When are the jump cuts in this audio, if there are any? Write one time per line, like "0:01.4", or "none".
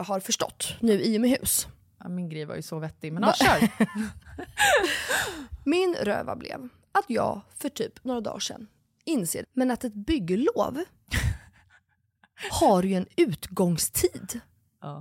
0:09.4